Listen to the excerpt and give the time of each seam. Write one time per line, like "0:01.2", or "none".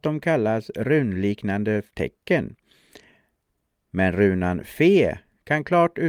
none